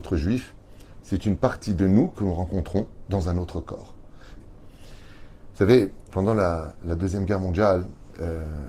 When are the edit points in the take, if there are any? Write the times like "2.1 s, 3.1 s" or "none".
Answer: 4.4 s, 6.1 s